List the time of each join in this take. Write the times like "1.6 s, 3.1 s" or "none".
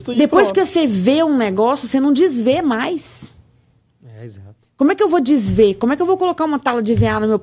none